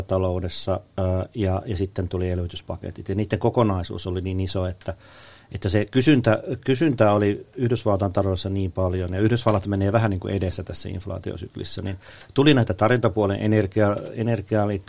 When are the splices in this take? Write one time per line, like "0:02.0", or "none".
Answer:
none